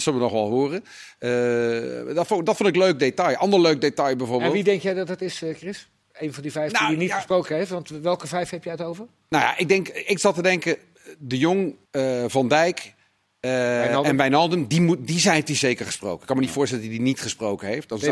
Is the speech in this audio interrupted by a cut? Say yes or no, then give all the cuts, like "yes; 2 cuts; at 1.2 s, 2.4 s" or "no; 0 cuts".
yes; 1 cut; at 11.9 s